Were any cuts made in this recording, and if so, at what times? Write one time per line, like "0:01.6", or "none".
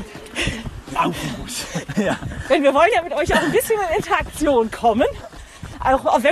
0:01.9